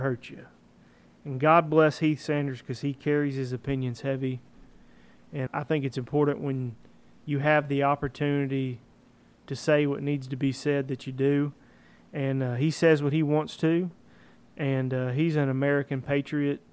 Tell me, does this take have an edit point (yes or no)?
yes